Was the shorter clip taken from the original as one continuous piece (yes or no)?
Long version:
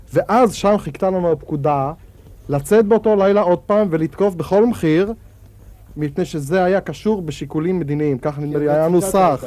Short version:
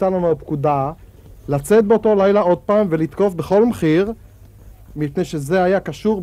yes